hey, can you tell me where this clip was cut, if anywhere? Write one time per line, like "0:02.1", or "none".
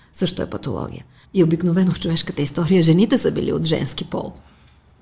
0:01.2